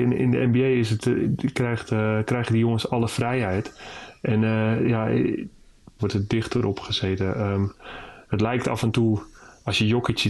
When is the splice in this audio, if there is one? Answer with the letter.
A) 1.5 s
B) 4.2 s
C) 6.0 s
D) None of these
C